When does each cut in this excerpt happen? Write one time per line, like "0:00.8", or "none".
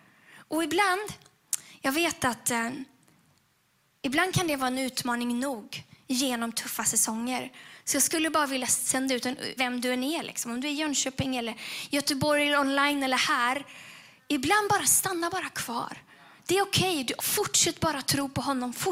0:09.6
0:17.2